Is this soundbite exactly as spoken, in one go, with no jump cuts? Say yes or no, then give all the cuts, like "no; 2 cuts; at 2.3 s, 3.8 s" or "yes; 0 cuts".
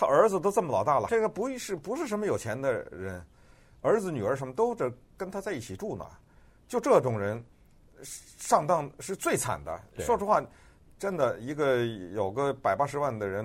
no; 1 cut; at 1.1 s